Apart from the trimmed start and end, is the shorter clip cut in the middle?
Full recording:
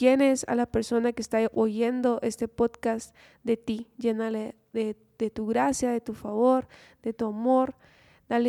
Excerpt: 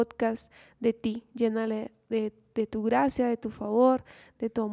no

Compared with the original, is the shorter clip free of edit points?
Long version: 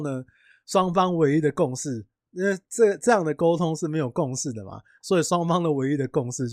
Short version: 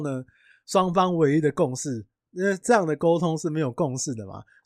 no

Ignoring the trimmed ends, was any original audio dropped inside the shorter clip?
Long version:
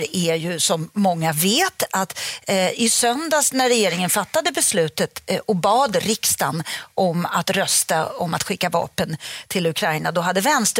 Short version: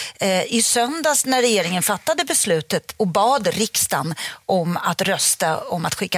yes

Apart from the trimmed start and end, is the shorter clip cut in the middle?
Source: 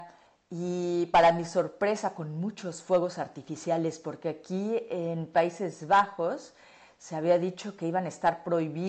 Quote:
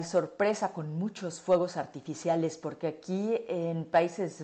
no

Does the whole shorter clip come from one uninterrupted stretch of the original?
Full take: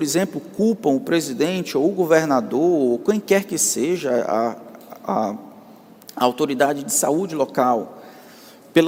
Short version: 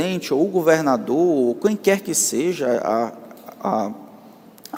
yes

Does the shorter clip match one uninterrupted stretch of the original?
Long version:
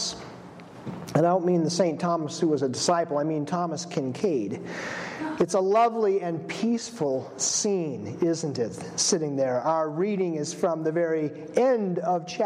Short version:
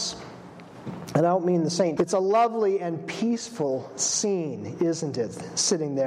no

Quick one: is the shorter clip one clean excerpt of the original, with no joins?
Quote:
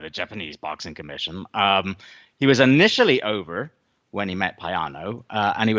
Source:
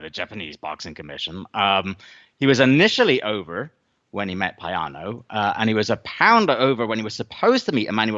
yes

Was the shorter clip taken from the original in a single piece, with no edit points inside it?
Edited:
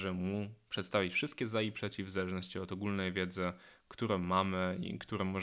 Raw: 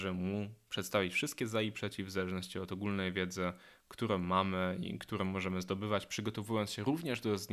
yes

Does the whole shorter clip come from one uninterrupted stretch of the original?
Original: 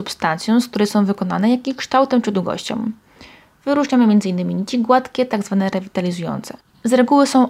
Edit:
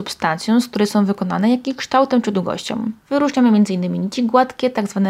no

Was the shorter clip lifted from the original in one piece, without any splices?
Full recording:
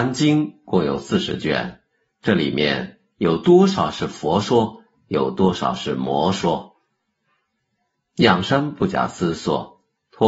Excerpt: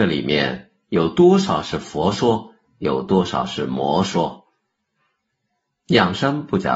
yes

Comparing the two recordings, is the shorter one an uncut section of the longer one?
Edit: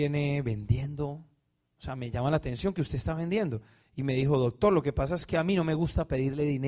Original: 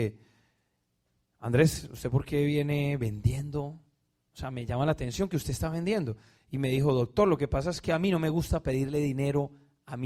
yes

